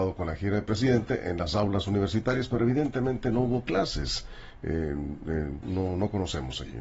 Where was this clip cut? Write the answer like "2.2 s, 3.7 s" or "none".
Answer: 5.6 s